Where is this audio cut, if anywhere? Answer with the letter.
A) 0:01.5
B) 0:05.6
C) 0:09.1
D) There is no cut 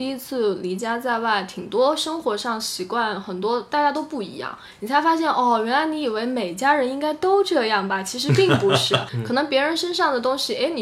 C